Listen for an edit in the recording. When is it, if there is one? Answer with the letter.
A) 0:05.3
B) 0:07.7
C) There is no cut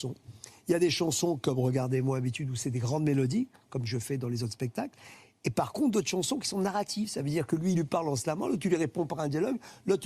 C